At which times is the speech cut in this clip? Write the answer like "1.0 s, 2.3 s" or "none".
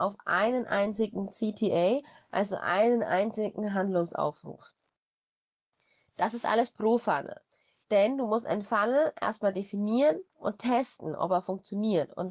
7.8 s